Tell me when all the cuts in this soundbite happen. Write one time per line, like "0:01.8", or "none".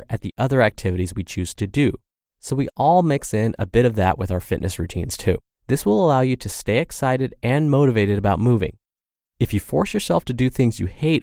0:05.5

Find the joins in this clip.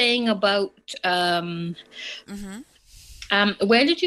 0:02.2

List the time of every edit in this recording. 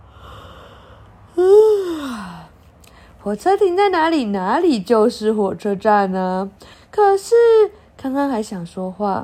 0:06.7

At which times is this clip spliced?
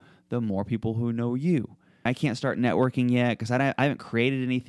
0:02.1

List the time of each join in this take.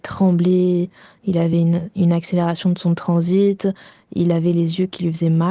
none

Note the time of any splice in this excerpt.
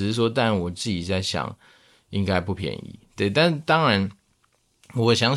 none

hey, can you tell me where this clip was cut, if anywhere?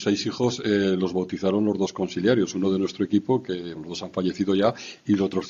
0:03.8

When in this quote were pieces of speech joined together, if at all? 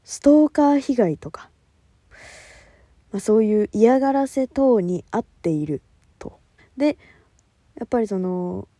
0:06.6

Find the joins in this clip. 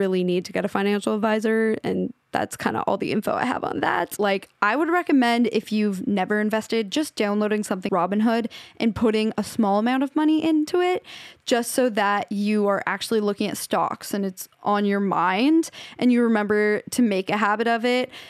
0:04.2
0:07.9

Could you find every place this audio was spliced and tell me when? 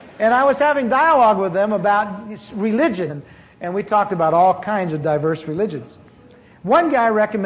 0:03.1

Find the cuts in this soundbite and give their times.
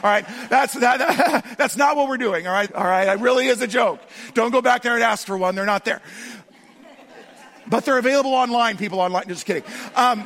0:02.7

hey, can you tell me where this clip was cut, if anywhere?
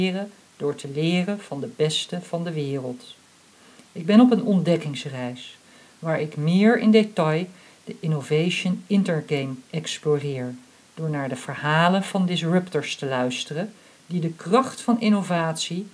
none

